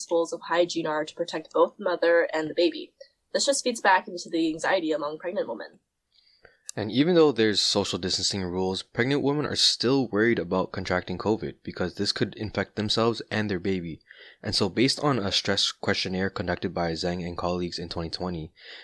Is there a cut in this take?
no; 0 cuts

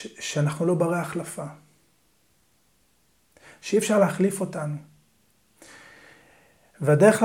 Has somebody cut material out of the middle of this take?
no; 0 cuts

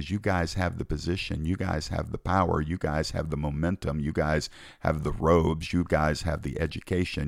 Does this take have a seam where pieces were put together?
no; 0 cuts

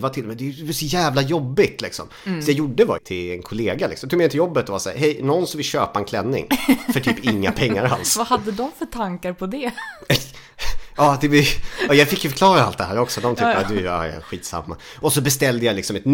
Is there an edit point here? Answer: yes; 1 cut; at 3.0 s

